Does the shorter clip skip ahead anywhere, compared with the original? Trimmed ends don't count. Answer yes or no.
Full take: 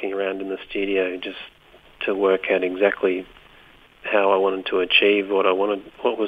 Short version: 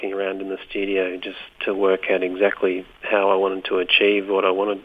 yes